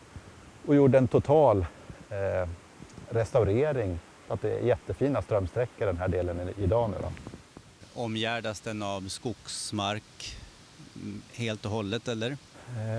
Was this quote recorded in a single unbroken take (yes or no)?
yes